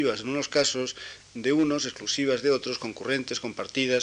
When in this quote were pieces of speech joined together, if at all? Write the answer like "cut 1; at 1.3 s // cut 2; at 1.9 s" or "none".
none